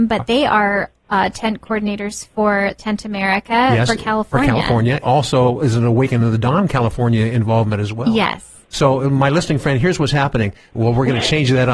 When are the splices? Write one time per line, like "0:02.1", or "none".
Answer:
0:05.0
0:10.7